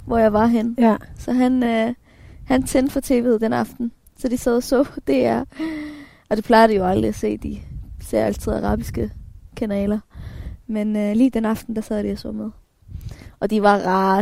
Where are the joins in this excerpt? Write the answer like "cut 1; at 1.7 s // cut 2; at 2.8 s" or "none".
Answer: none